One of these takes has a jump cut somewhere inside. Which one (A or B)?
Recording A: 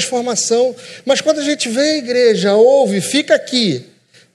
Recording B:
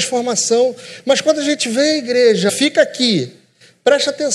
B